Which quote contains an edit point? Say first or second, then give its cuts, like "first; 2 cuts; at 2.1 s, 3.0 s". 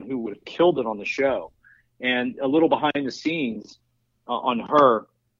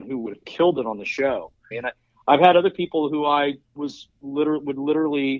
second; 2 cuts; at 1.7 s, 3.6 s